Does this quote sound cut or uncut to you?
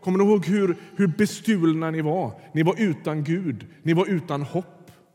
uncut